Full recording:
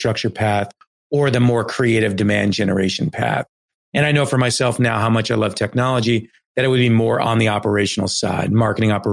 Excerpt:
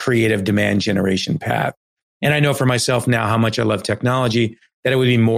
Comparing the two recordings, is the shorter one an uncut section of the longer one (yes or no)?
yes